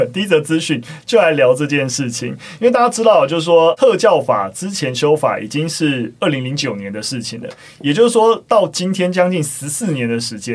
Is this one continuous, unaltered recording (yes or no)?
yes